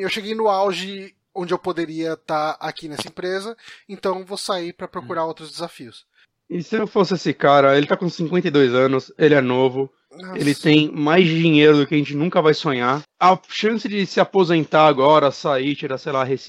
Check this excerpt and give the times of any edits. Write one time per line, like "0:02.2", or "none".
0:13.0